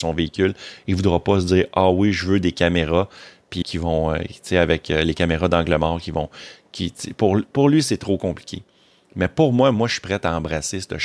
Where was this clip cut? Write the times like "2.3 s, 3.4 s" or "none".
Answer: 3.6 s